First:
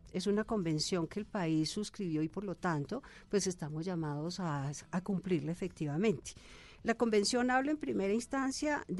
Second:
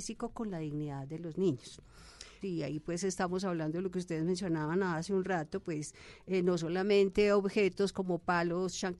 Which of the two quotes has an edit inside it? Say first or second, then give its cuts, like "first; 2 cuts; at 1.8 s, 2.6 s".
second; 1 cut; at 2.4 s